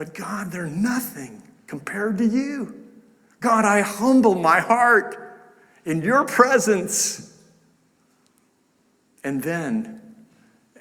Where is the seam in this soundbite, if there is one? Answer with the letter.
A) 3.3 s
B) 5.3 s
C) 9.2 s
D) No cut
D